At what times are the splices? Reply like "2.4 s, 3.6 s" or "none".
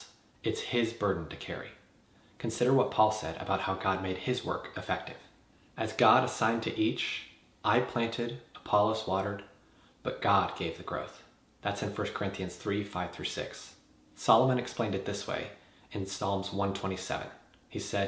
none